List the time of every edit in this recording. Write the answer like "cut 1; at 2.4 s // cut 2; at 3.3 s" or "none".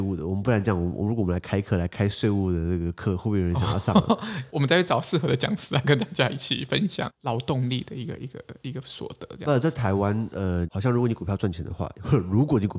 cut 1; at 4.5 s // cut 2; at 7.1 s // cut 3; at 10.7 s

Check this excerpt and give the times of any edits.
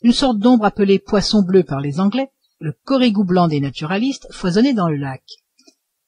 cut 1; at 2.6 s

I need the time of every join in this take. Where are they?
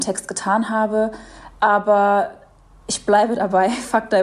none

